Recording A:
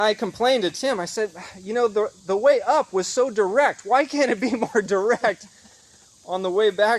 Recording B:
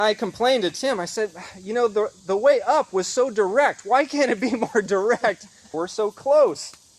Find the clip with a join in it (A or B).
B